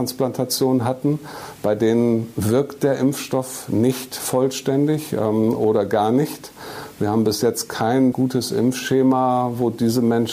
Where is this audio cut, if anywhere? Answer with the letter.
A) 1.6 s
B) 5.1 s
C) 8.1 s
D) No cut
C